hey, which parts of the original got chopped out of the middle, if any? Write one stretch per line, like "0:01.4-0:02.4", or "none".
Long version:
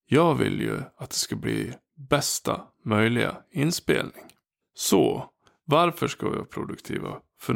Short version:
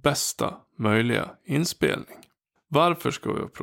0:04.6-0:05.5